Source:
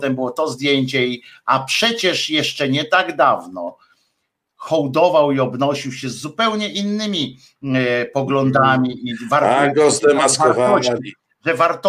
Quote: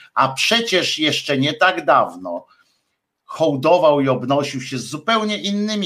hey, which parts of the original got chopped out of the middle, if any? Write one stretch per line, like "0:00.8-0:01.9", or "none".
none